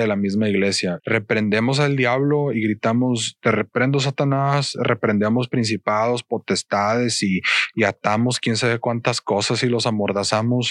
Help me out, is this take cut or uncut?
cut